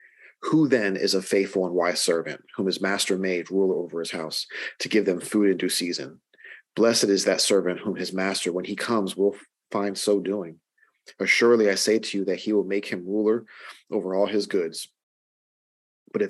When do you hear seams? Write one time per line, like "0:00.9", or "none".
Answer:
none